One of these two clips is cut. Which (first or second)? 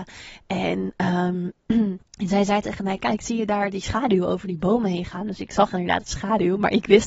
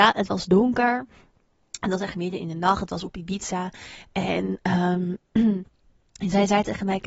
first